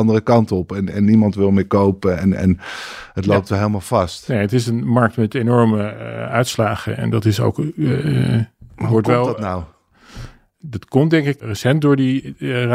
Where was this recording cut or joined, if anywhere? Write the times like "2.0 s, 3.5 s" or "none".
none